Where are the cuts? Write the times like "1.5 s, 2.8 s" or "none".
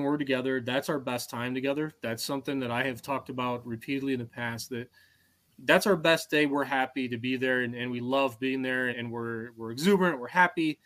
8.9 s